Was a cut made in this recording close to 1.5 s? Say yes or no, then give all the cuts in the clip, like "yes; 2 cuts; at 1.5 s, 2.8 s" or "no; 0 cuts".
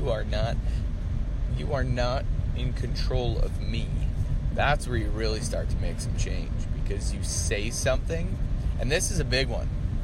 no; 1 cut; at 4.5 s